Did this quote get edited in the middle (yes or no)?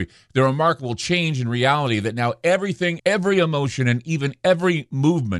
yes